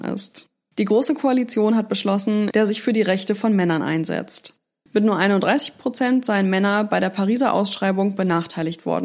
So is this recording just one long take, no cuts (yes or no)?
no